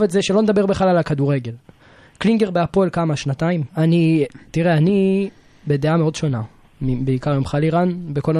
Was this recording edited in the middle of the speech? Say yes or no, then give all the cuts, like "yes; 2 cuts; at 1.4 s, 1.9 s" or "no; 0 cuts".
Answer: yes; 1 cut; at 3.7 s